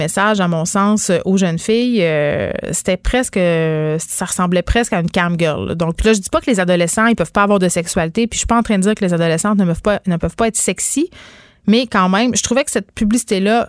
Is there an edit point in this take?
no; 0 cuts

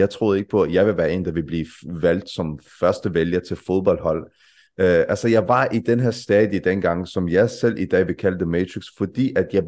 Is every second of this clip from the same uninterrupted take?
yes; 0 cuts

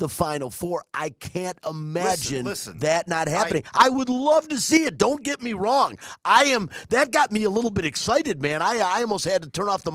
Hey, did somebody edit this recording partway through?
no; 0 cuts

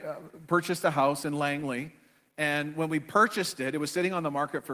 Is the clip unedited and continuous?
yes; 0 cuts

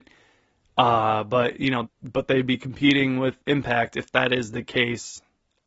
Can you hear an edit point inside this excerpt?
yes; 2 cuts; at 1.8 s, 3.4 s

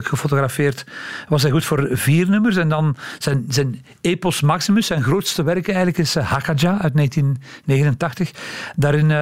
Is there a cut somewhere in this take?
no; 0 cuts

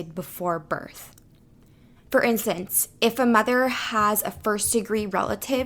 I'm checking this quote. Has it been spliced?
yes; 1 cut; at 2.0 s

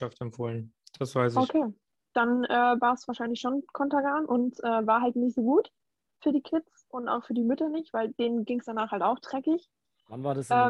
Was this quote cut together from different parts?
no; 0 cuts

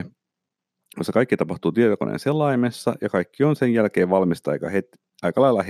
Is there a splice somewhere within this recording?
no; 0 cuts

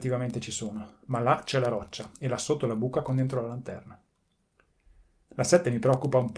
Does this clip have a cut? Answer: no; 0 cuts

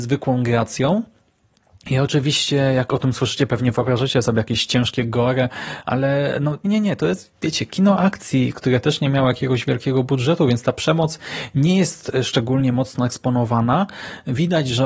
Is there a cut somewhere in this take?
yes; 1 cut; at 6.6 s

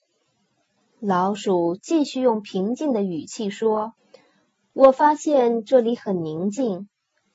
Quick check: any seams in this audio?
yes; 1 cut; at 4.0 s

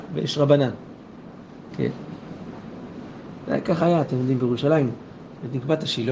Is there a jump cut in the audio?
yes; 1 cut; at 1.7 s

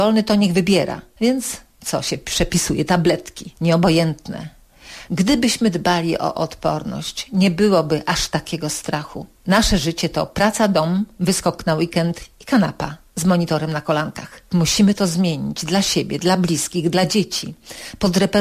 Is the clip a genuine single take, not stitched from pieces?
no; 1 cut; at 1.2 s

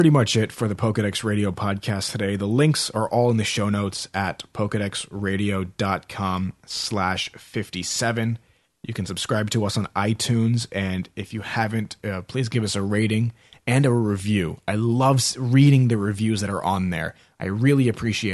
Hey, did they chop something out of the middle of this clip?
yes; 1 cut; at 8.6 s

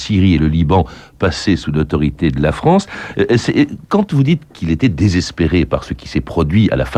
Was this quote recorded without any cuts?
yes; 0 cuts

